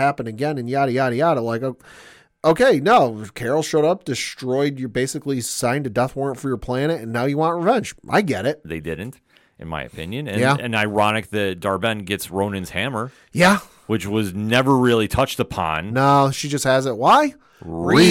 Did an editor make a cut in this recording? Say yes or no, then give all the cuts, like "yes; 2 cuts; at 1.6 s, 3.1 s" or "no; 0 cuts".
yes; 1 cut; at 8.6 s